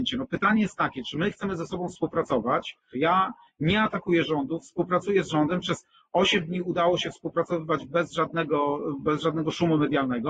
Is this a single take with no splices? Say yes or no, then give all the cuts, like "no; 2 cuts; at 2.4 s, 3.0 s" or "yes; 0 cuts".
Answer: no; 1 cut; at 2.9 s